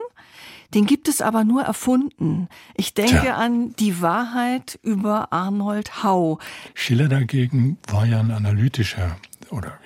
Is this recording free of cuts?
no; 1 cut; at 6.7 s

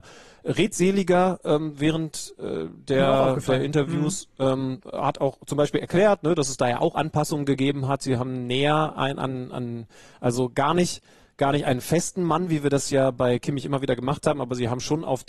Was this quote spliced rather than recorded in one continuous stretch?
no; 0 cuts

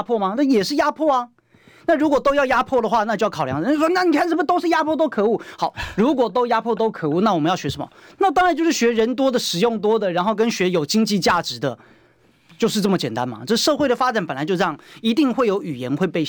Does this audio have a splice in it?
no; 0 cuts

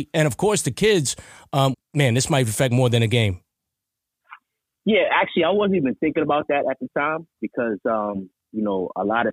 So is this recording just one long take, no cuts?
no; 1 cut; at 1.7 s

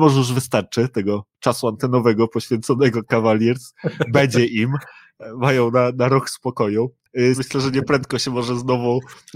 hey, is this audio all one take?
no; 1 cut; at 7.4 s

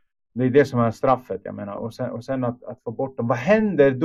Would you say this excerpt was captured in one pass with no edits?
yes; 0 cuts

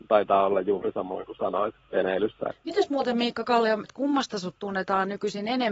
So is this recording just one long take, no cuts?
no; 2 cuts; at 2.5 s, 3.8 s

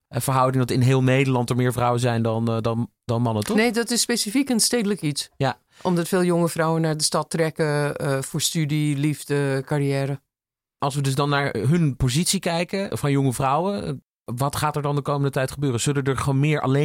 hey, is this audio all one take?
yes; 0 cuts

